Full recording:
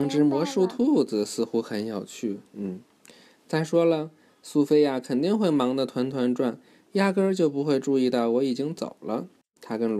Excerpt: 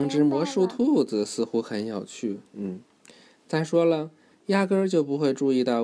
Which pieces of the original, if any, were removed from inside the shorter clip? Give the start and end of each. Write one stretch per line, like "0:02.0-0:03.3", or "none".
0:04.3-0:06.8